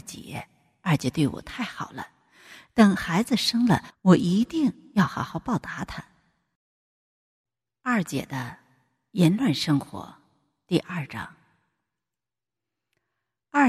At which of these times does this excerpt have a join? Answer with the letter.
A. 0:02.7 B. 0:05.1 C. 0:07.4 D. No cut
D